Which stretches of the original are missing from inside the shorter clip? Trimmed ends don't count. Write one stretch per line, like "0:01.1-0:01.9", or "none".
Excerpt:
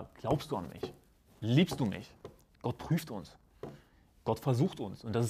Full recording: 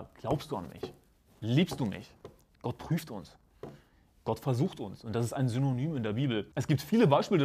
none